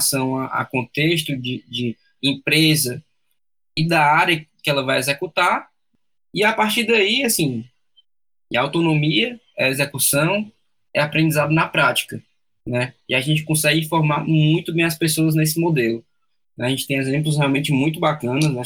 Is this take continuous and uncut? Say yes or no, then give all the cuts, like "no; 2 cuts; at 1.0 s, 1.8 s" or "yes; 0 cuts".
yes; 0 cuts